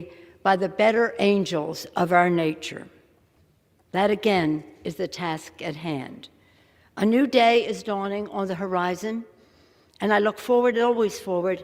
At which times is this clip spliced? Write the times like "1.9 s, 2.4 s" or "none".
none